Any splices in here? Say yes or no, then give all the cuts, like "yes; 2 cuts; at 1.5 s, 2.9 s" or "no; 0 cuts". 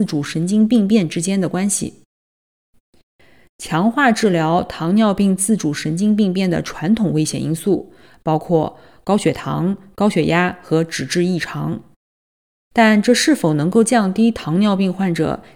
no; 0 cuts